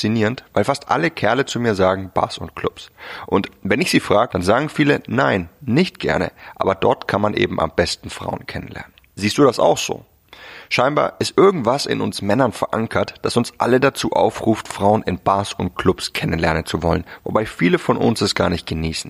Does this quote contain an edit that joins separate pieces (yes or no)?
yes